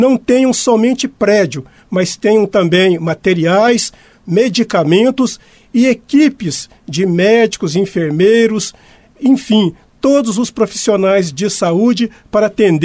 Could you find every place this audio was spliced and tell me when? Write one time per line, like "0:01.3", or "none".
none